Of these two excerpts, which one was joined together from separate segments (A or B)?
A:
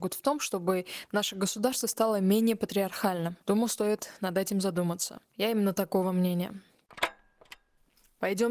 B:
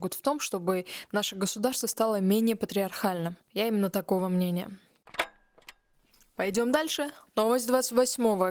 B